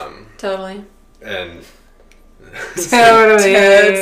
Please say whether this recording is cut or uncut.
uncut